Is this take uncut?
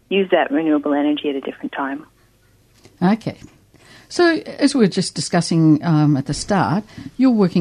yes; 0 cuts

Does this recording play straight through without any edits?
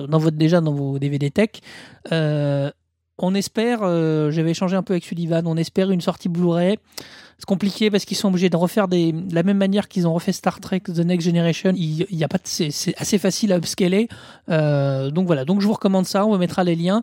no; 2 cuts; at 11.7 s, 14.3 s

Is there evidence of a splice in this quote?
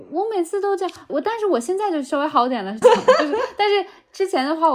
yes; 2 cuts; at 1.1 s, 2.8 s

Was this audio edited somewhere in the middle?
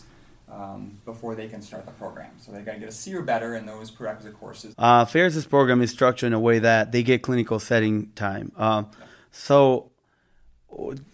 yes; 1 cut; at 4.7 s

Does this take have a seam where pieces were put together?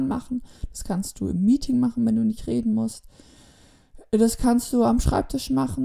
no; 0 cuts

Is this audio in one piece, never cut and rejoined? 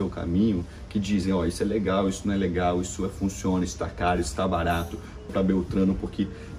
no; 2 cuts; at 3.6 s, 5.3 s

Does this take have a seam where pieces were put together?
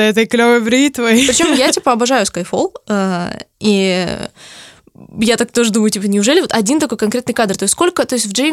no; 0 cuts

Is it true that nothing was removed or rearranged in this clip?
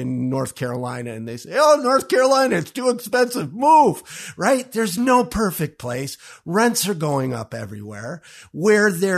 yes; 0 cuts

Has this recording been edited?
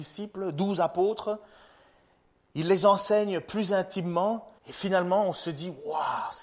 yes; 1 cut; at 4.6 s

